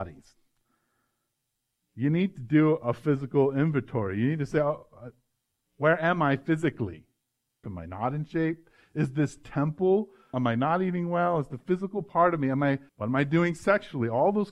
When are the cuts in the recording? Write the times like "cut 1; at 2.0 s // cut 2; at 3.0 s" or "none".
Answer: cut 1; at 7.6 s // cut 2; at 10.3 s // cut 3; at 12.9 s